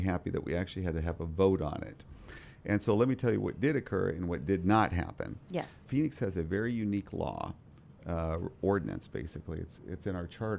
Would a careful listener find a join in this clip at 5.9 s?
yes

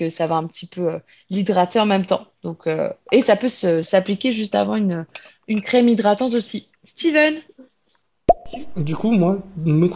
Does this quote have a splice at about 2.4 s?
no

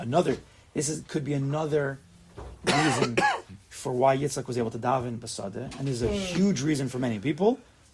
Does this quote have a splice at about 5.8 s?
no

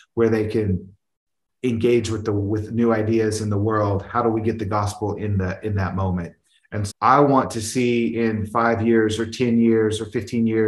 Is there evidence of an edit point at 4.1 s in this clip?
no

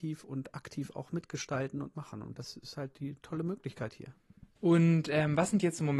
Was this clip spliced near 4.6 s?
yes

